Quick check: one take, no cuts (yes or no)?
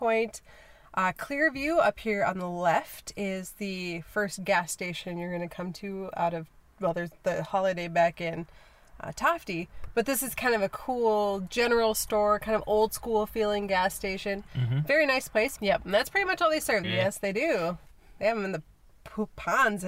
no